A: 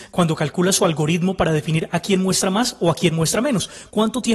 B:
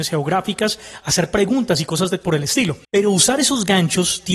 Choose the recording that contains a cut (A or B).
B